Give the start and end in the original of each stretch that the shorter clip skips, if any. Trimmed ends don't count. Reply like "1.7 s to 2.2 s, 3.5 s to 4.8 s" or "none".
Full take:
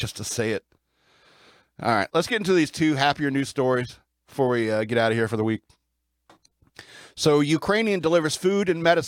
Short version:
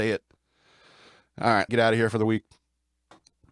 2.1 s to 4.9 s